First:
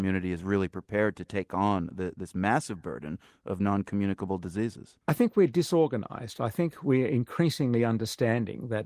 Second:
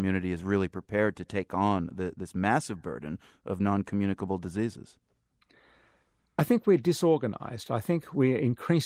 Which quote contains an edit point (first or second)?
first